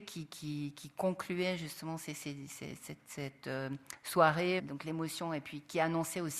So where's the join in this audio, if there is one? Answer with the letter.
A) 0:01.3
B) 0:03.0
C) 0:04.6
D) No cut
C